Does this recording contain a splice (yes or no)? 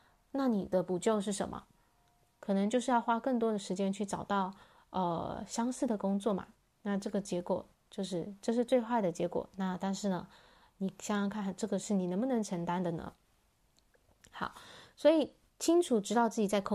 no